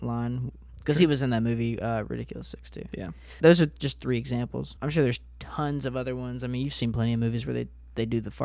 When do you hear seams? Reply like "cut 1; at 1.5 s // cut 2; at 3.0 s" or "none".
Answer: cut 1; at 3.4 s // cut 2; at 4.8 s